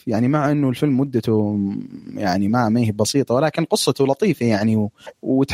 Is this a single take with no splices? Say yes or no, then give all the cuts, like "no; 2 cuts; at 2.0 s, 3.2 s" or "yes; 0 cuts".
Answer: yes; 0 cuts